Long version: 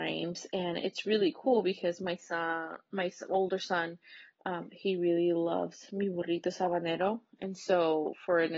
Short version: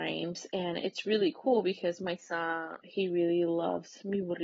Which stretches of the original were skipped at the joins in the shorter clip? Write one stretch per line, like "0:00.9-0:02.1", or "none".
0:02.8-0:04.7